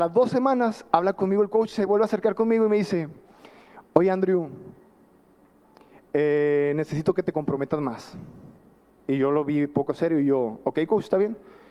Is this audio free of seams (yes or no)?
yes